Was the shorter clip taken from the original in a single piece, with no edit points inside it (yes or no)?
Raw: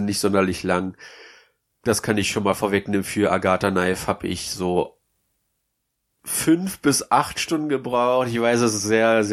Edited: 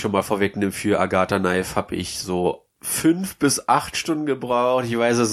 no